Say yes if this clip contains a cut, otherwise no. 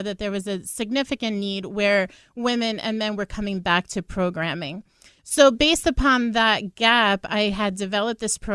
no